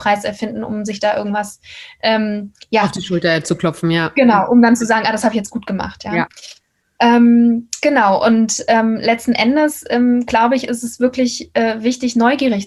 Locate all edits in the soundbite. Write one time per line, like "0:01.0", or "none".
none